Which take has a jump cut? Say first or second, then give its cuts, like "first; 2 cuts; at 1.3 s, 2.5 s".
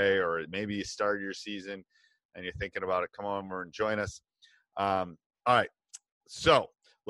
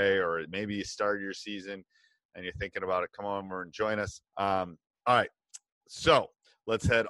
second; 1 cut; at 4.3 s